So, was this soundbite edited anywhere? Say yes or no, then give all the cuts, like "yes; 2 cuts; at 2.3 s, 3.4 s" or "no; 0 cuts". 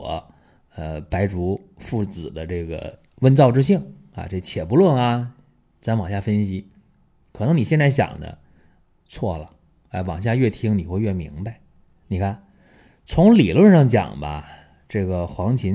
no; 0 cuts